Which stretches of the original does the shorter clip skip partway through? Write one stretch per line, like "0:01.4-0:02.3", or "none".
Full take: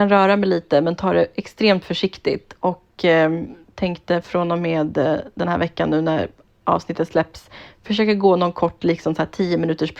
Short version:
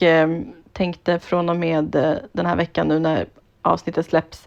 none